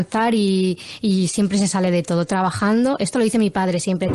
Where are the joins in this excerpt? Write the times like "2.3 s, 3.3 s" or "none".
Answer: none